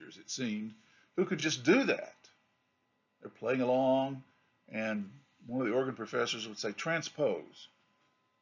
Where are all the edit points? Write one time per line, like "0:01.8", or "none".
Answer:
none